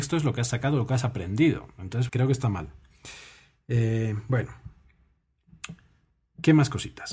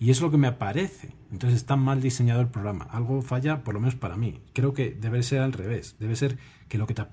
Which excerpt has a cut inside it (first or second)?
first